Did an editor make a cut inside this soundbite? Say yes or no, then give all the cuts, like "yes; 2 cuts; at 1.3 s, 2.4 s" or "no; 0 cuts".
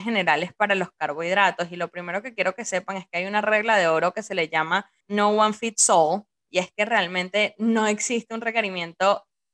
no; 0 cuts